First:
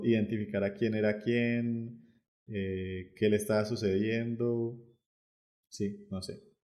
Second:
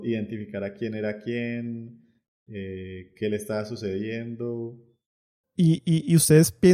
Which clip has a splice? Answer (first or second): second